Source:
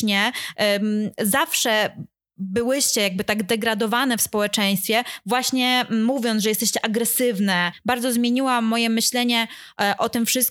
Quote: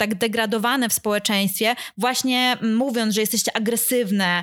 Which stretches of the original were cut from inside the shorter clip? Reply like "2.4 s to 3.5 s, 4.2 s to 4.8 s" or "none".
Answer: none